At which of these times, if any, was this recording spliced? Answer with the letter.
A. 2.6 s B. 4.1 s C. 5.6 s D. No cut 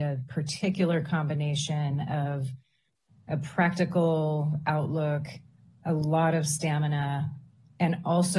D